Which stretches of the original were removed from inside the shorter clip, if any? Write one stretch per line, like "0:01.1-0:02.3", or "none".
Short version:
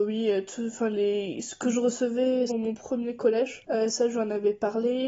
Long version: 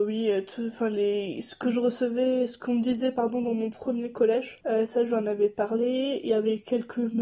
0:02.5-0:03.4